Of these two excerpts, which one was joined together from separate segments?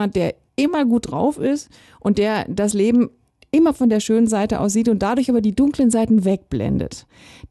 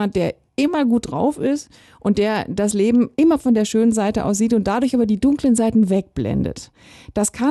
second; 1 cut; at 3.1 s

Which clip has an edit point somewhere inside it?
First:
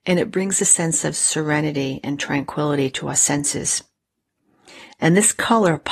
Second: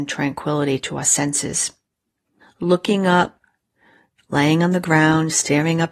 second; 1 cut; at 2.4 s

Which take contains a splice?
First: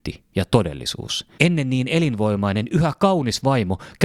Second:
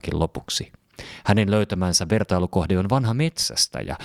first; 1 cut; at 1.4 s

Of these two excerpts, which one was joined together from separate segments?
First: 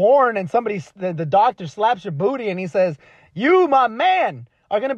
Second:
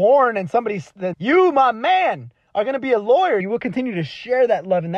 second; 2 cuts; at 1.1 s, 3.4 s

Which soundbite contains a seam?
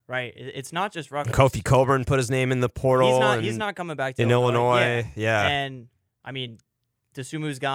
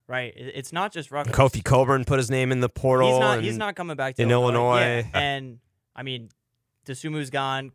second; 1 cut; at 5.1 s

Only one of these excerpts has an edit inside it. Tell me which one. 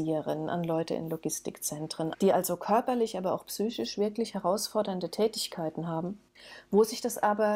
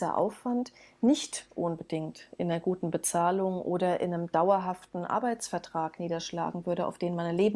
first; 1 cut; at 2.1 s

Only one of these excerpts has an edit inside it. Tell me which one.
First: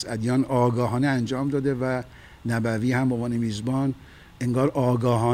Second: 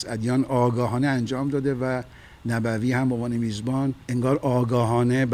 second; 1 cut; at 4.0 s

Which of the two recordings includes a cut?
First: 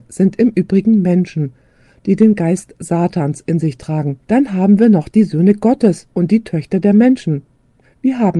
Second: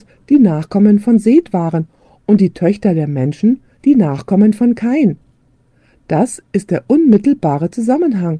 first; 2 cuts; at 4.2 s, 6.1 s

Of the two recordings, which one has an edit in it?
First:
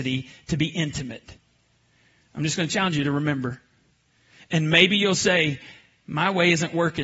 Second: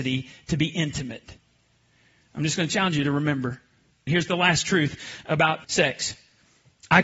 second; 2 cuts; at 4.1 s, 5.6 s

